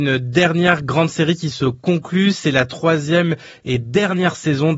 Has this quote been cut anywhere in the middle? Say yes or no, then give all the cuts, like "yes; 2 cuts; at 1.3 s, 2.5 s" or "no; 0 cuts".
no; 0 cuts